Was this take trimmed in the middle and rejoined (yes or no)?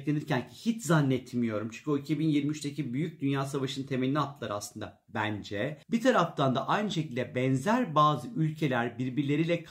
yes